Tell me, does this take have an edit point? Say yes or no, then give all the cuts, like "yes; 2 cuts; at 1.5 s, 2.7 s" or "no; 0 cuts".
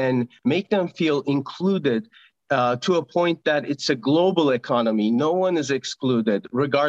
no; 0 cuts